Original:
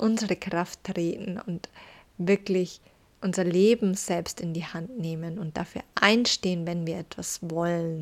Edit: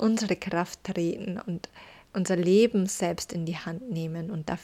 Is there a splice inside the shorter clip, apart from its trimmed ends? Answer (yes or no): yes